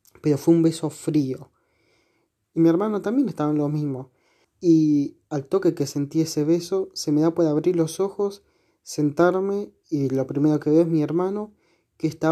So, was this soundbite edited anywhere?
yes; 2 cuts; at 2.4 s, 4.4 s

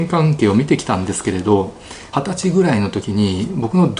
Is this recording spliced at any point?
yes; 1 cut; at 2.1 s

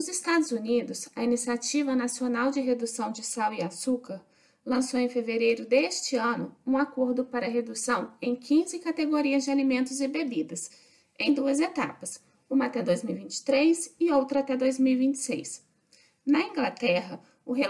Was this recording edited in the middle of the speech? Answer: no; 0 cuts

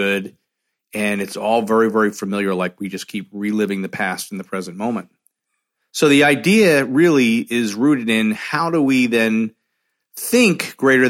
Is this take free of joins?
yes; 0 cuts

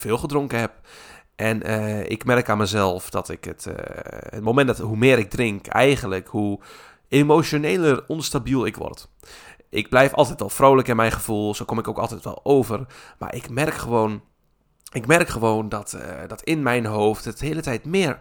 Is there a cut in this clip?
no; 0 cuts

